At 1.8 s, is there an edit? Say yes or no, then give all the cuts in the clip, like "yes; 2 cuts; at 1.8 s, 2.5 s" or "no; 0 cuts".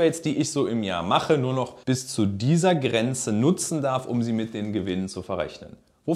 yes; 1 cut; at 1.8 s